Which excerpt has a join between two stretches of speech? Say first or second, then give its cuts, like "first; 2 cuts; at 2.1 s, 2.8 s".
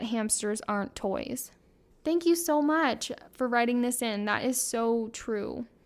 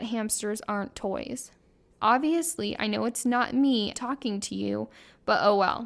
second; 2 cuts; at 1.9 s, 3.9 s